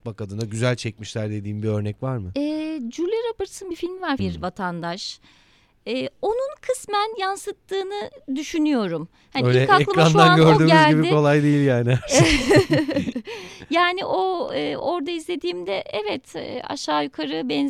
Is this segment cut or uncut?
cut